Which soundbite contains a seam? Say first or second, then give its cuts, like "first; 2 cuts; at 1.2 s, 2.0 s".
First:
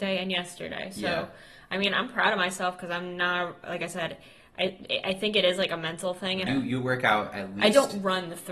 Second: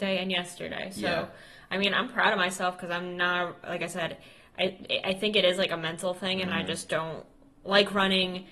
first; 1 cut; at 6.5 s